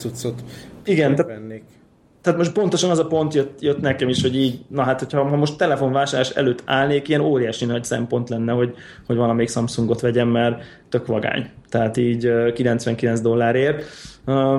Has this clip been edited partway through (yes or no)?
no